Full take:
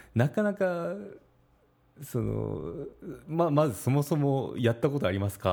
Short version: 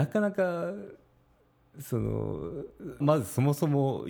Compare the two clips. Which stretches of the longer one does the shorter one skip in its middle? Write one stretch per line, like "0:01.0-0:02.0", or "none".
0:03.2-0:03.5